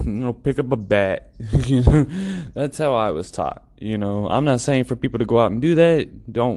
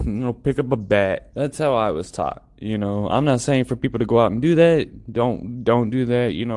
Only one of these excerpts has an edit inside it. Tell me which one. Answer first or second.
second